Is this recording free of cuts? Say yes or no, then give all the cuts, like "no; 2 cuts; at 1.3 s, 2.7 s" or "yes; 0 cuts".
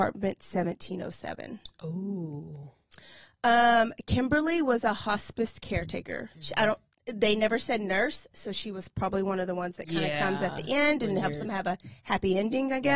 no; 1 cut; at 6.3 s